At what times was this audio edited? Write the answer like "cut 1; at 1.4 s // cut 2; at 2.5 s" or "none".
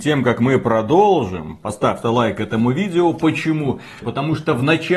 cut 1; at 2.0 s // cut 2; at 4.0 s